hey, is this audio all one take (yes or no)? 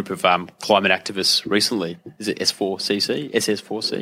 yes